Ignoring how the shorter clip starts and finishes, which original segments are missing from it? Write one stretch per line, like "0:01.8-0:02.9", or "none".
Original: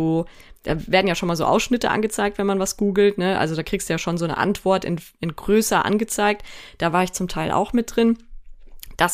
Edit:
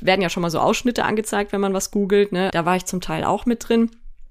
0:03.3-0:06.8